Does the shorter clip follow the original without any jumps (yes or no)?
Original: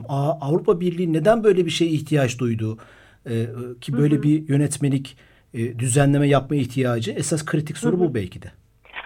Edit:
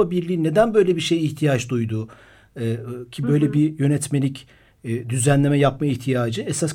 yes